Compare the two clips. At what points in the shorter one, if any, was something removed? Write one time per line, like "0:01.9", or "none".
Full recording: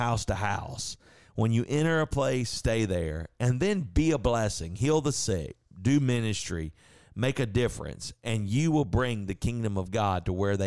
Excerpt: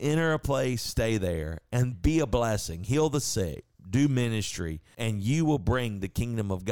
0:01.9
0:04.9